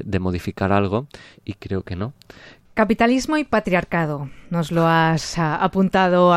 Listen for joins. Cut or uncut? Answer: cut